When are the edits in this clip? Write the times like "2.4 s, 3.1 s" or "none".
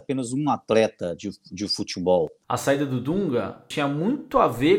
2.4 s, 3.7 s

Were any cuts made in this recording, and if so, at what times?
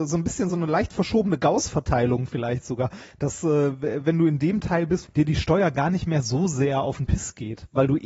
5.0 s

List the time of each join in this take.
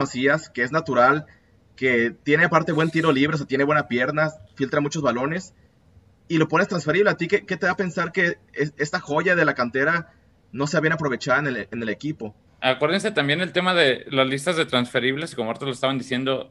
12.5 s

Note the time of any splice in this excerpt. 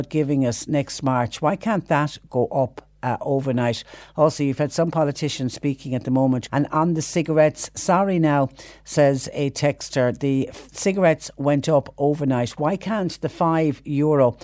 6.5 s

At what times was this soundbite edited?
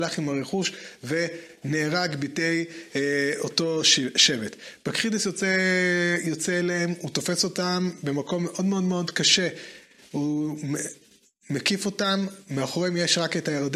none

